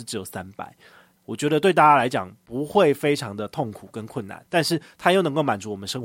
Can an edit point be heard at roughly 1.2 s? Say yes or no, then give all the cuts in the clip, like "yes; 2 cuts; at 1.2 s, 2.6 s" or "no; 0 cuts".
yes; 1 cut; at 1.2 s